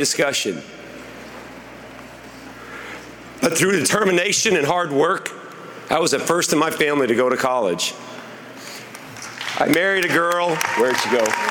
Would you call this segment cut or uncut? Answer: cut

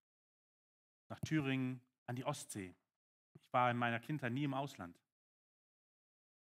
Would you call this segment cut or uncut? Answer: uncut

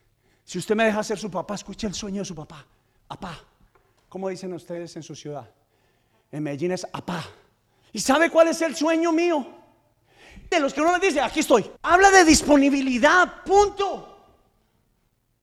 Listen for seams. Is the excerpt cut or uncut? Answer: cut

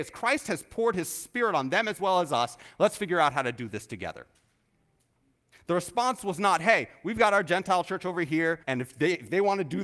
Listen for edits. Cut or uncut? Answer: cut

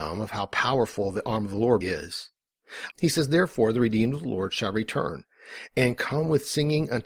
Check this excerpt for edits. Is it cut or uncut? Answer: cut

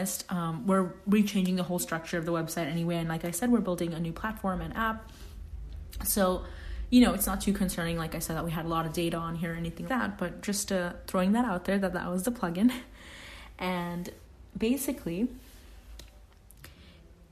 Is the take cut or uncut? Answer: cut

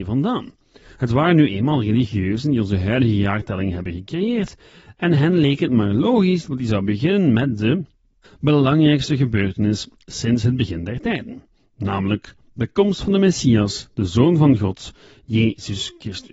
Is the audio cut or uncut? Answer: cut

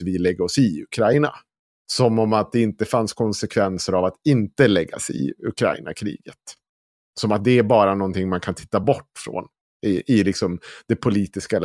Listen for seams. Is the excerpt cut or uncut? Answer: uncut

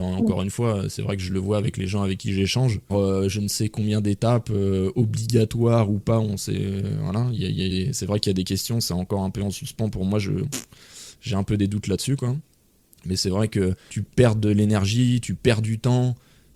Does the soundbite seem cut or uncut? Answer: cut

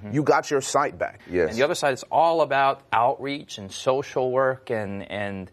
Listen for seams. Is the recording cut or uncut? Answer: cut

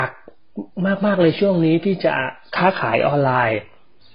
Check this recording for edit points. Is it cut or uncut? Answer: uncut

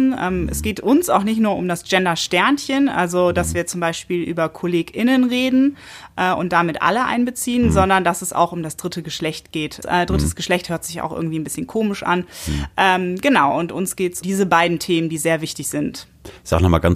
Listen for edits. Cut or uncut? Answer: cut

